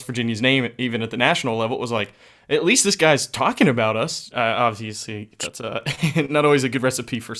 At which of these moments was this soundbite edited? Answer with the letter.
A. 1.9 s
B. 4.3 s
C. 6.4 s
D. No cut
B